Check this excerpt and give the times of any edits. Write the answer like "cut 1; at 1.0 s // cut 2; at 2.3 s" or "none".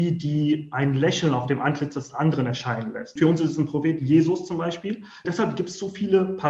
cut 1; at 3.2 s // cut 2; at 5.2 s